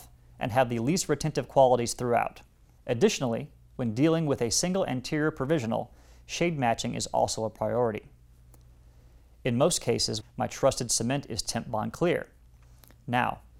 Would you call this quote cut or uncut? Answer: cut